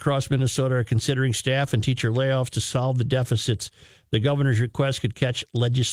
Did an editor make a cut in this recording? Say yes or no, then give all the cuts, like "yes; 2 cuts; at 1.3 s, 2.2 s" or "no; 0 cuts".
no; 0 cuts